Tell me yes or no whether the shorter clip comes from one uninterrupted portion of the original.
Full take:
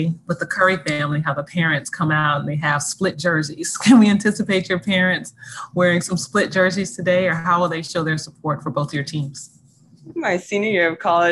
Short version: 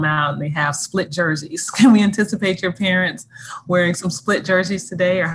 yes